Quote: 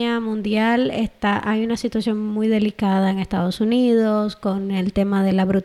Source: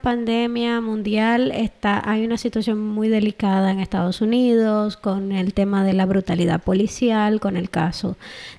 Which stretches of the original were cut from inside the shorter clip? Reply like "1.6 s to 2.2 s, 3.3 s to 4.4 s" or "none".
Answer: none